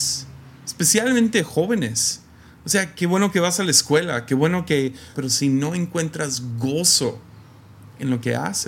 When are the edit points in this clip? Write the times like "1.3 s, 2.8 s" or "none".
5.1 s